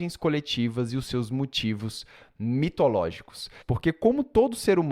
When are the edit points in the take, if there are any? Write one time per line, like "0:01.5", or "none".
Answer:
0:03.6